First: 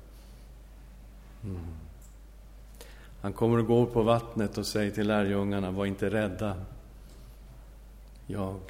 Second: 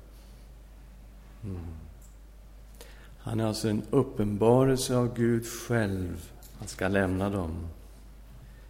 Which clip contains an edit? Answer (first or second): second